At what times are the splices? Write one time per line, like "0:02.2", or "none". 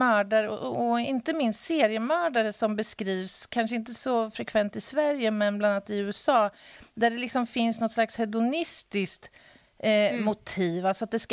none

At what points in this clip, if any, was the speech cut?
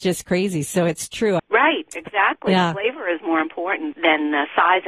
0:01.4
0:03.9

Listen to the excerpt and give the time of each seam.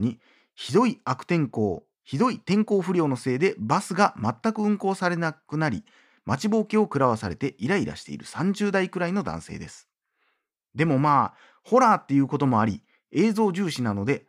0:01.9

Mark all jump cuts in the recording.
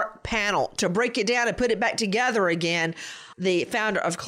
0:03.3

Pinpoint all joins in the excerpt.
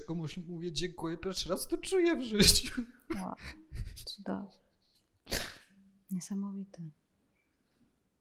none

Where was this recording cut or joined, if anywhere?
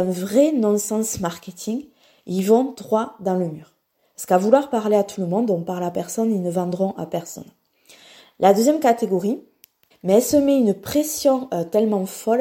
0:09.9

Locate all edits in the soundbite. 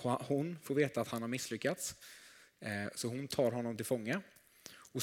none

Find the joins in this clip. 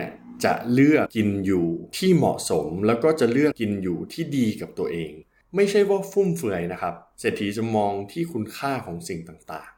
0:01.1
0:03.5

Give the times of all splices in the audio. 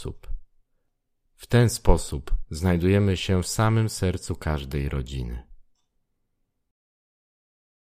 none

